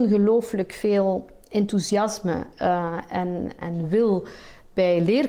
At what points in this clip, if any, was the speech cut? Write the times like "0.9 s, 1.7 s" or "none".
3.6 s